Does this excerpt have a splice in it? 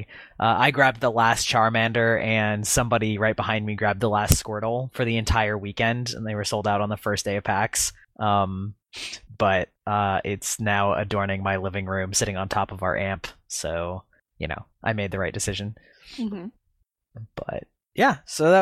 no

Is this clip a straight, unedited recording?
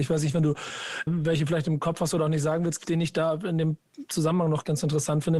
no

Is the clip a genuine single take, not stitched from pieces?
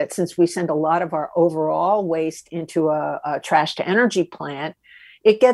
yes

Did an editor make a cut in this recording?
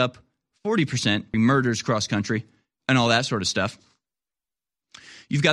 yes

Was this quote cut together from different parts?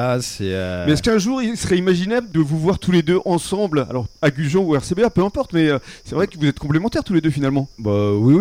no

